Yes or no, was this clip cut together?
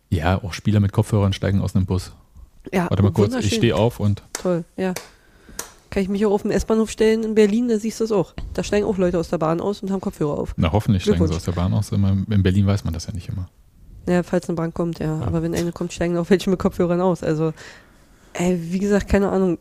no